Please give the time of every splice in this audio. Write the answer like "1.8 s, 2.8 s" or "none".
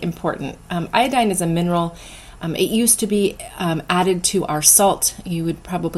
2.4 s